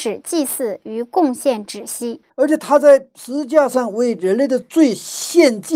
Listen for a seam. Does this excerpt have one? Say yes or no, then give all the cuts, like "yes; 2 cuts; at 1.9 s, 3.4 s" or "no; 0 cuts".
yes; 1 cut; at 2.3 s